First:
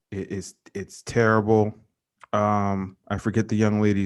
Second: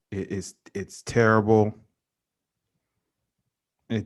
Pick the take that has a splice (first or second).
first